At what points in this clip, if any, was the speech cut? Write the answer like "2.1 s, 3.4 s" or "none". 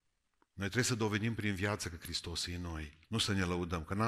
3.0 s